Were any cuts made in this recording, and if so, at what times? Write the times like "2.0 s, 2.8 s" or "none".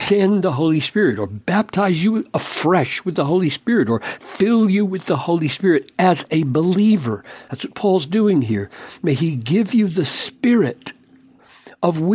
none